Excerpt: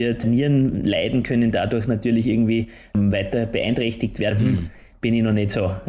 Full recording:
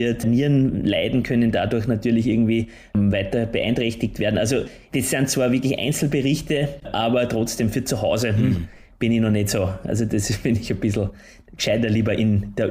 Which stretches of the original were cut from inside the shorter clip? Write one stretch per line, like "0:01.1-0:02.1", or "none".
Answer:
0:04.3-0:08.3